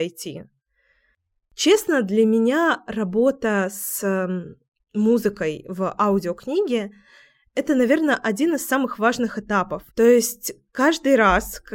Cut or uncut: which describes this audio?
cut